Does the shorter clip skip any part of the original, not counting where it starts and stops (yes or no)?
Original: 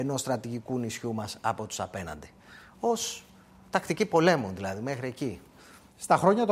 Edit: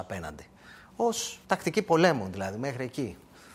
yes